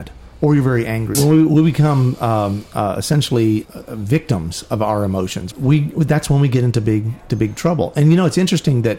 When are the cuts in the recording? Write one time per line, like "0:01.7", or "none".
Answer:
0:01.1
0:03.6
0:05.5